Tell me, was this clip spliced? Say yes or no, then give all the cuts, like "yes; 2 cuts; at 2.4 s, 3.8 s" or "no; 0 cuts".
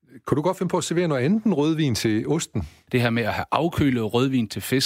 yes; 1 cut; at 2.9 s